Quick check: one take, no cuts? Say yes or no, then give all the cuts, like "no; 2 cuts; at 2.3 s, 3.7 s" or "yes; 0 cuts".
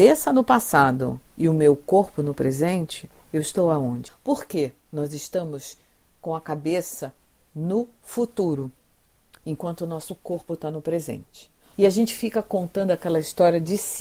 no; 2 cuts; at 4.1 s, 11.7 s